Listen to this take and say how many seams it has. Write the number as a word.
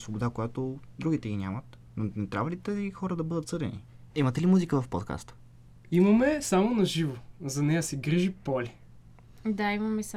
one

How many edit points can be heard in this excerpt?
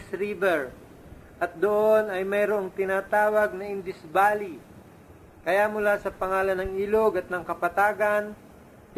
zero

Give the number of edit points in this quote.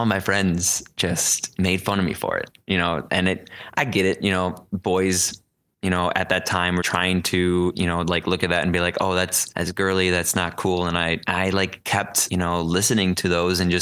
one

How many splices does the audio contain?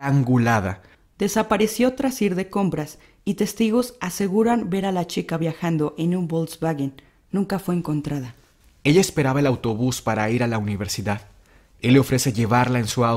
two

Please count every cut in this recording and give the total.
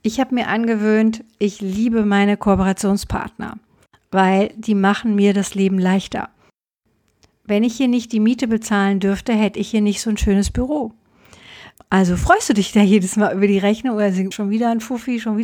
two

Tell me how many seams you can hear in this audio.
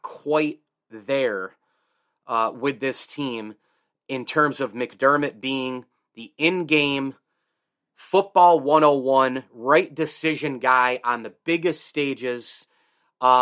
zero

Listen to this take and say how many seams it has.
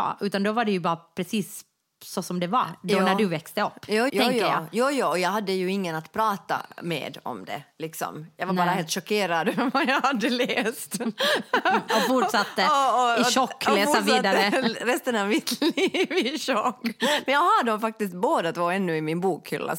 one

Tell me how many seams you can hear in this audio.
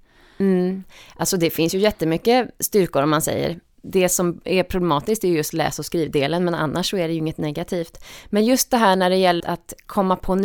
one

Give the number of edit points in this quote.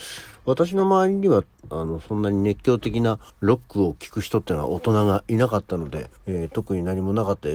two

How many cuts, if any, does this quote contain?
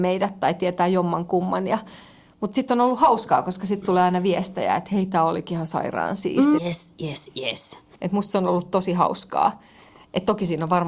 two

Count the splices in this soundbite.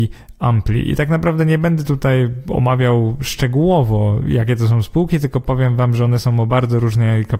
zero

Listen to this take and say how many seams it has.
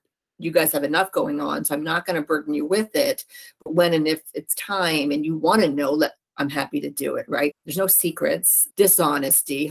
two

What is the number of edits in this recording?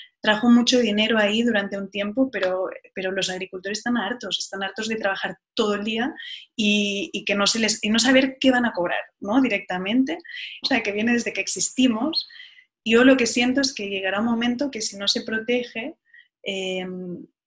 one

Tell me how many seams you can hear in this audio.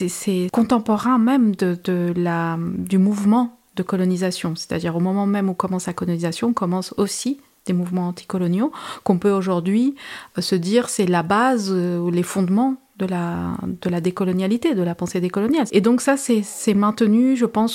one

